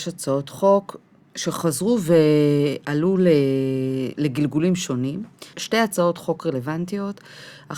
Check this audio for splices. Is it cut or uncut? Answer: cut